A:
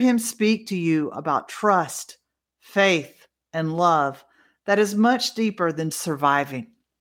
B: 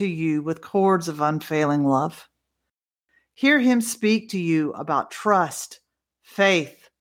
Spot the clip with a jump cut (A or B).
A